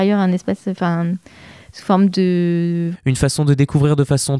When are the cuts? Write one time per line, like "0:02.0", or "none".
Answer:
0:02.9